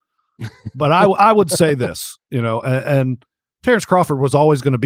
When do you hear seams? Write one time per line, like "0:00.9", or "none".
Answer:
none